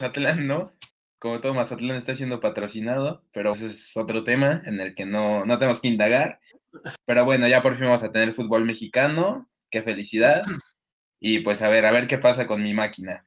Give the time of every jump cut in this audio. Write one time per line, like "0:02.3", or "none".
0:03.5
0:07.0